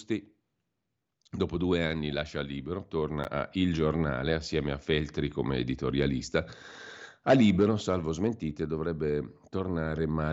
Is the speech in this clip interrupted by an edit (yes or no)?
no